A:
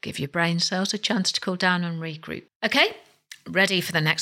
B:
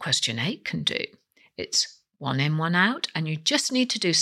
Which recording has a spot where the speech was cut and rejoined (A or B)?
A